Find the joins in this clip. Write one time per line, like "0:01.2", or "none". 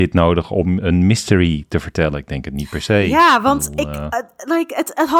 none